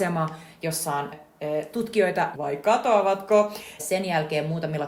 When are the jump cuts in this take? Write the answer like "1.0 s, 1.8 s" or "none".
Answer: 1.1 s, 2.3 s, 3.8 s